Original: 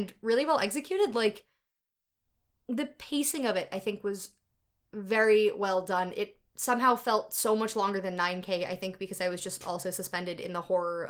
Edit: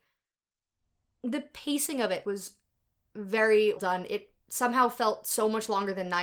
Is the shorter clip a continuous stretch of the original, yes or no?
no